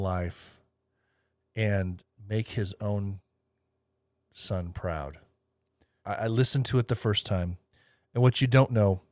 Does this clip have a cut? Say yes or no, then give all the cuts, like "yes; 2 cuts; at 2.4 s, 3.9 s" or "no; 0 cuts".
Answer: yes; 1 cut; at 6.0 s